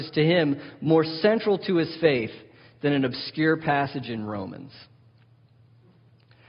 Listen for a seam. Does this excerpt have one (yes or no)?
no